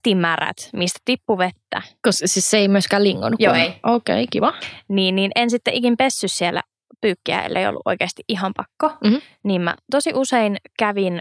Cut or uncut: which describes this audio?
uncut